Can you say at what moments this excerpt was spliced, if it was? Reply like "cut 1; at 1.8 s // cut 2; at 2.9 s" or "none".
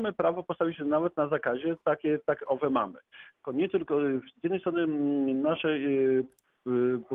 cut 1; at 3.4 s